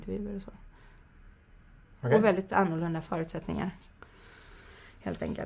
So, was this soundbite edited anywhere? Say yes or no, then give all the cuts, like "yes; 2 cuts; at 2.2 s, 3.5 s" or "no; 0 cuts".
no; 0 cuts